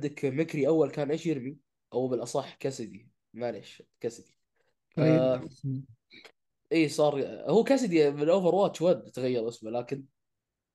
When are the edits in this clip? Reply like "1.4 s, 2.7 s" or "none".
none